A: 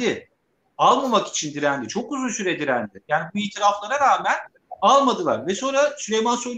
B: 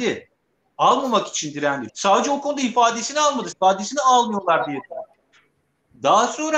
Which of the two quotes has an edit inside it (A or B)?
B